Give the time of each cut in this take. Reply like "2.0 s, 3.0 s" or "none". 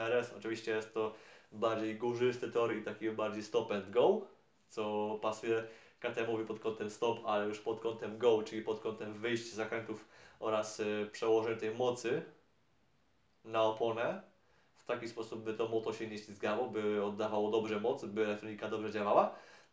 none